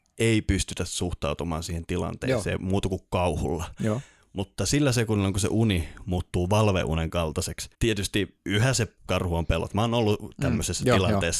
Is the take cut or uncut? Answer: cut